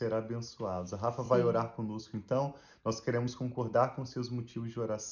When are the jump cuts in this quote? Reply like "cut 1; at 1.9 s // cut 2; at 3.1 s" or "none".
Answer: none